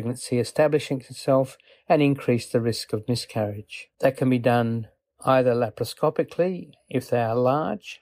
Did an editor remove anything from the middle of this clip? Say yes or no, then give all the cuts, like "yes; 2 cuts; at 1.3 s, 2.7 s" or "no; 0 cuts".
yes; 1 cut; at 3.9 s